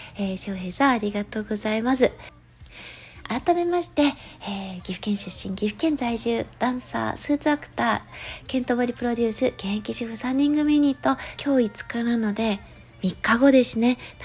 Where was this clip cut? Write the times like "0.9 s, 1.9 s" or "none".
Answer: 11.4 s